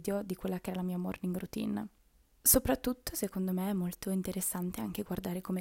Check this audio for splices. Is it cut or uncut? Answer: uncut